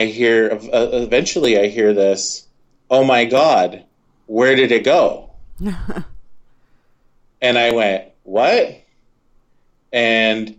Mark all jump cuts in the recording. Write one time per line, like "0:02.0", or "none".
none